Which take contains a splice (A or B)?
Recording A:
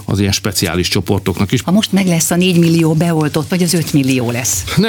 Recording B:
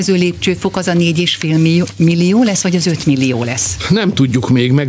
A